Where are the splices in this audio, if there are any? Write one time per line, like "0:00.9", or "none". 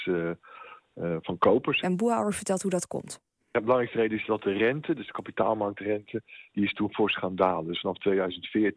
0:01.8